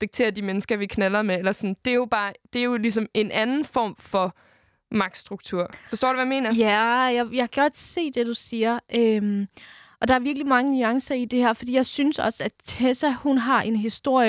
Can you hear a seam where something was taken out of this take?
no; 0 cuts

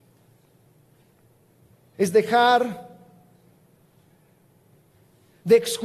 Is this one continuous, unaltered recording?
no; 1 cut; at 1.9 s

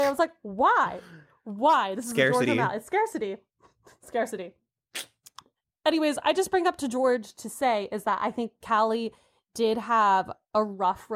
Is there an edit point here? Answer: no; 0 cuts

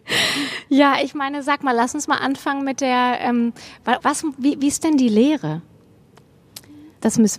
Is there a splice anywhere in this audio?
yes; 1 cut; at 4.0 s

